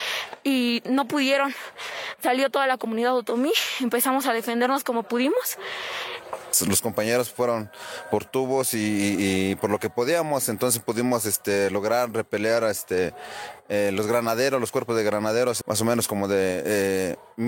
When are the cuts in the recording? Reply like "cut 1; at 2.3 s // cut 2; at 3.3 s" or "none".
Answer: cut 1; at 15.6 s